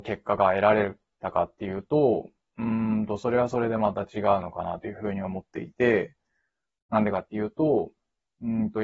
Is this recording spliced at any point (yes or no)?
no